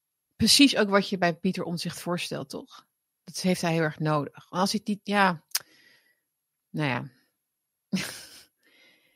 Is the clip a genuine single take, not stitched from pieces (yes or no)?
yes